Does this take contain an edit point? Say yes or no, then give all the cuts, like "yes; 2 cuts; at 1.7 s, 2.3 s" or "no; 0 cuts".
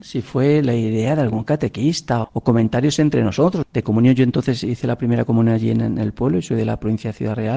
yes; 2 cuts; at 2.2 s, 3.6 s